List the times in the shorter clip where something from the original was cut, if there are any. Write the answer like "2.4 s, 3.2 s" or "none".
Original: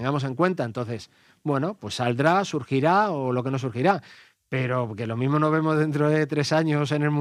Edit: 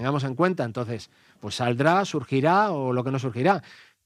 1.4 s